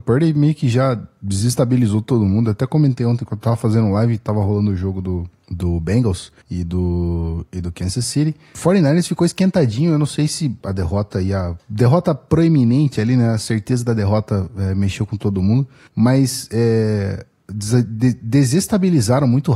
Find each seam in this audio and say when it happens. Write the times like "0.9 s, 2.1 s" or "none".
10.6 s